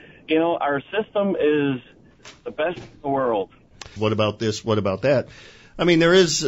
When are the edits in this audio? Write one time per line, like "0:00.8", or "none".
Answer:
0:04.0